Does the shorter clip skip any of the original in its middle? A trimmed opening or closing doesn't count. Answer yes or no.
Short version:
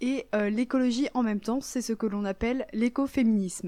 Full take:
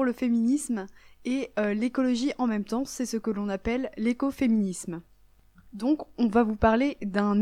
no